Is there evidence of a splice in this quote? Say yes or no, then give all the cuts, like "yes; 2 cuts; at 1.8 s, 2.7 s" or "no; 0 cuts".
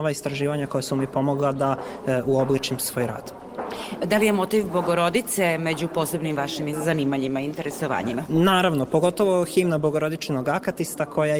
no; 0 cuts